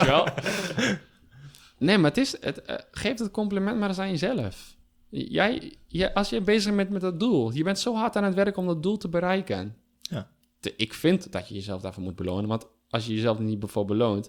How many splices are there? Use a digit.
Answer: 1